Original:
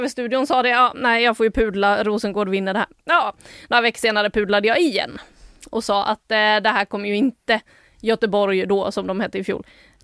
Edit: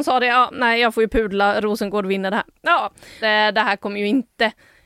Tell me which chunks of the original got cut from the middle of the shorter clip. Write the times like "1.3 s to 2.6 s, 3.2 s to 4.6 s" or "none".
3.6 s to 6.3 s